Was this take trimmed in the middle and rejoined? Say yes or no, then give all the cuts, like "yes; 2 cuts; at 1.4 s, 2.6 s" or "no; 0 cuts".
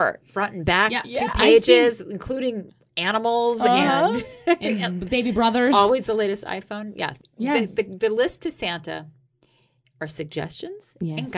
no; 0 cuts